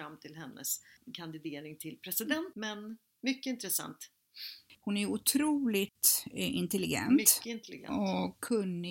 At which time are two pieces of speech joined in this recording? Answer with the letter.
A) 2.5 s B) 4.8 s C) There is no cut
A